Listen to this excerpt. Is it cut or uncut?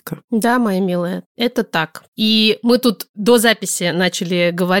cut